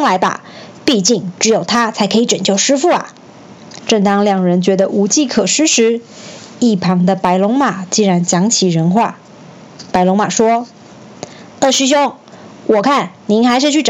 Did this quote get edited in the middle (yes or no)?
yes